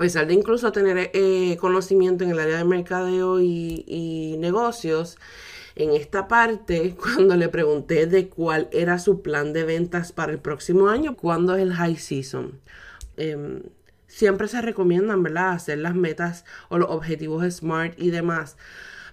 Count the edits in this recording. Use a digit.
2